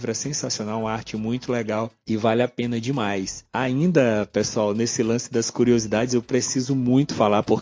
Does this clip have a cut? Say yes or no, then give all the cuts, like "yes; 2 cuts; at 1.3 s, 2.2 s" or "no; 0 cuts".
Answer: no; 0 cuts